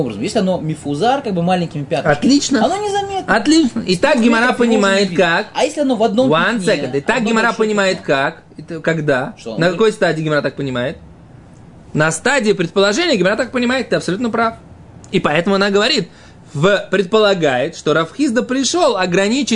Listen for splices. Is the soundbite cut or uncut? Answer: uncut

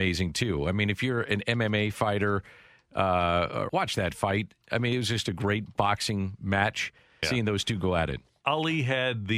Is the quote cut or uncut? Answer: cut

